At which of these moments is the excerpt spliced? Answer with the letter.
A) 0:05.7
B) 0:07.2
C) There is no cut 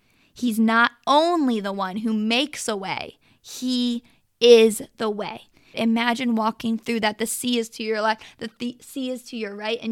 A